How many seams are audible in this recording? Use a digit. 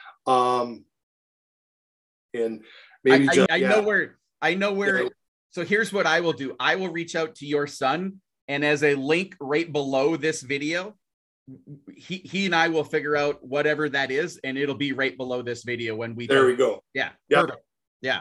1